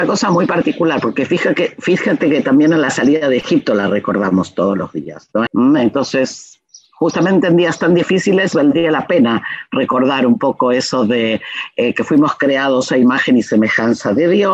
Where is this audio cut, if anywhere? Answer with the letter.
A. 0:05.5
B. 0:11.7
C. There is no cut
A